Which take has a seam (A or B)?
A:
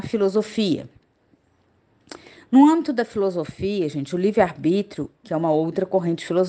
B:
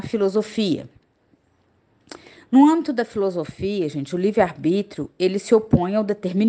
A